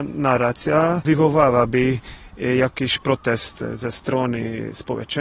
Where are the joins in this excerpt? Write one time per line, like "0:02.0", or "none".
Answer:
none